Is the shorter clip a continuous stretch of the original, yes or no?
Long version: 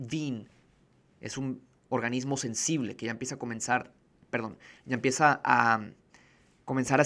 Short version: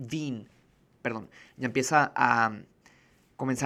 no